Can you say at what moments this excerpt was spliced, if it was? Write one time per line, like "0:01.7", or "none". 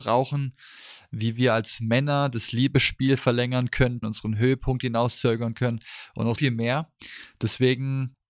0:04.0
0:06.4